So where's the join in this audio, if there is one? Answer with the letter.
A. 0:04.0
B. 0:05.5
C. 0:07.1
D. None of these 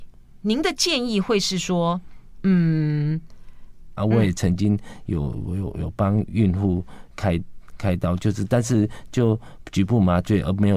A